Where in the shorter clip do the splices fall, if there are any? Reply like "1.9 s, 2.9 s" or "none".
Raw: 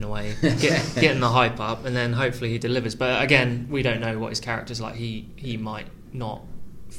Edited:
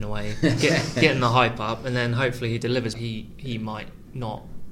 2.9 s